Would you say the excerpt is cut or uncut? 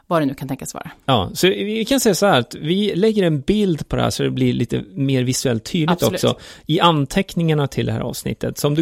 uncut